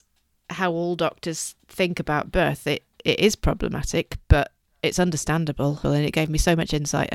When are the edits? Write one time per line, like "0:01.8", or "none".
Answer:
0:05.8